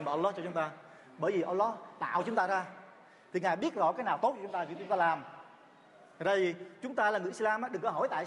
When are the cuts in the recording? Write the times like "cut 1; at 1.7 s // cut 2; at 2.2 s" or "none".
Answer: none